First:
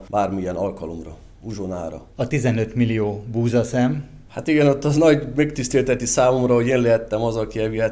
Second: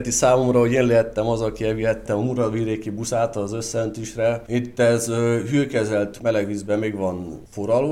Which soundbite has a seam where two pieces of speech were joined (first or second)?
second